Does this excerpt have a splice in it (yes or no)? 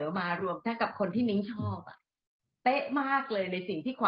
no